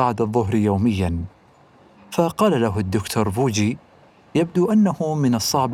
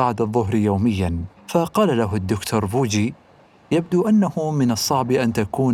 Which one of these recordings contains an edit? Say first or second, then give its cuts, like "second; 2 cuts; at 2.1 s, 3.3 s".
second; 1 cut; at 1.4 s